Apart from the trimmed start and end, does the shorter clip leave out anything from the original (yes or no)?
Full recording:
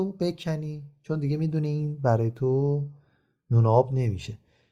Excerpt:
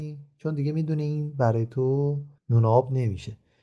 yes